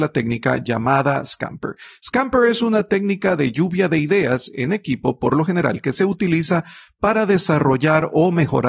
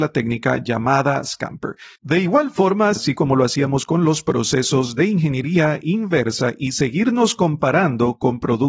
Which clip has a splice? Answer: second; 2 cuts; at 1.9 s, 3.0 s

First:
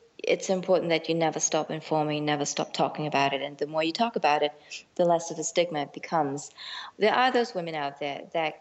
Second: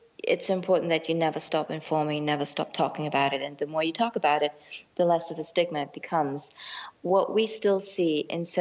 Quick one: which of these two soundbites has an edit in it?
first; 1 cut; at 7.0 s

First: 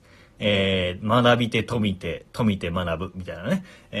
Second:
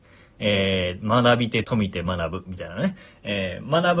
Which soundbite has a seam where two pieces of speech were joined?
second; 1 cut; at 1.6 s

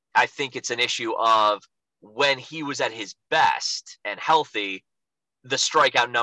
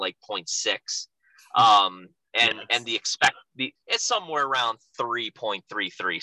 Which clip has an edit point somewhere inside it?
second; 2 cuts; at 3.8 s, 4.9 s

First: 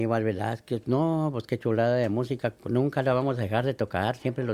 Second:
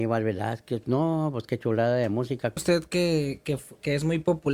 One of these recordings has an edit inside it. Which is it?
second; 1 cut; at 2.6 s

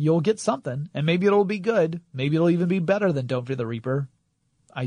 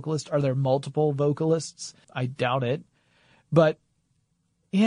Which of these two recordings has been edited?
second; 1 cut; at 2.0 s

